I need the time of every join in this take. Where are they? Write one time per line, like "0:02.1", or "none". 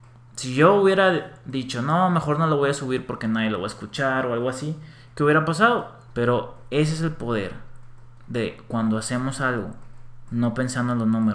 0:06.1